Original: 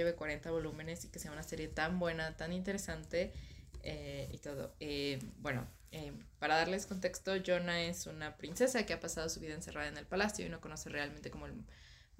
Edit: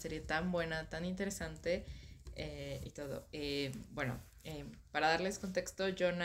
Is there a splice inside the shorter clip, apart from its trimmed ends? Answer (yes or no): no